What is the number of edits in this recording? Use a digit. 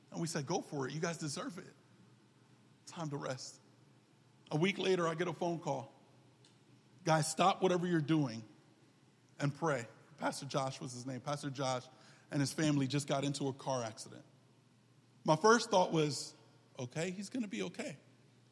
0